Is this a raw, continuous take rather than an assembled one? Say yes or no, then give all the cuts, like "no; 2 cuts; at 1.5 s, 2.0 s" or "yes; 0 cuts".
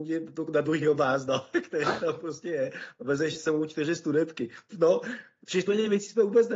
no; 1 cut; at 4.7 s